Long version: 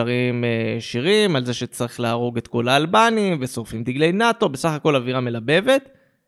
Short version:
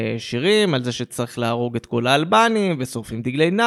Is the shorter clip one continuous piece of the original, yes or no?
yes